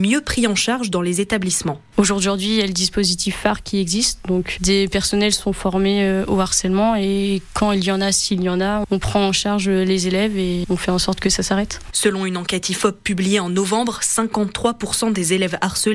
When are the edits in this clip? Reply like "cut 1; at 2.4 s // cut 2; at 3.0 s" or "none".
cut 1; at 4.6 s